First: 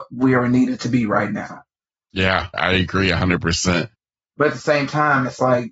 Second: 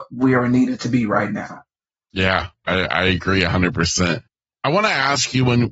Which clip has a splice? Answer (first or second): first